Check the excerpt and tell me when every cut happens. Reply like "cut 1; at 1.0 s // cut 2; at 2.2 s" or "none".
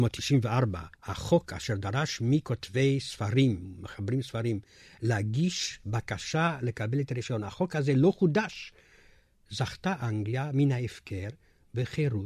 cut 1; at 0.9 s